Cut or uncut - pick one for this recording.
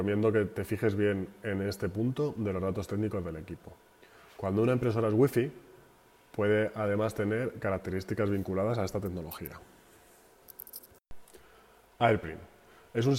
uncut